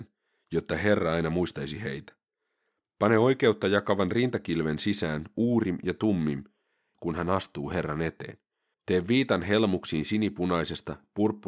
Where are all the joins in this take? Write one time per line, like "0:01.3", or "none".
0:06.9
0:08.7